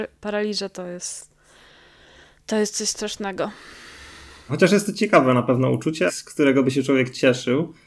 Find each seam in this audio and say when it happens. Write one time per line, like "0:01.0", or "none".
0:04.5
0:06.1